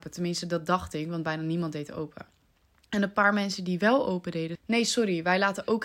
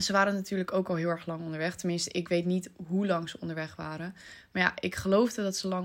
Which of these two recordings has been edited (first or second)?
first